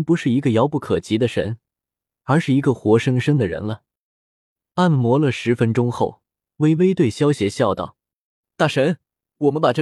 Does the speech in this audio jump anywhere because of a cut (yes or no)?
no